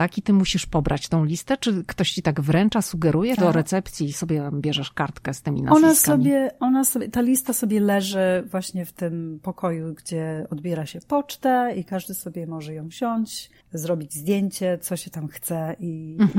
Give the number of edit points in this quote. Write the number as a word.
two